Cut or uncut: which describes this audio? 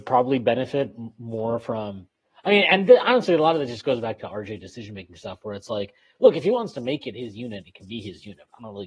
uncut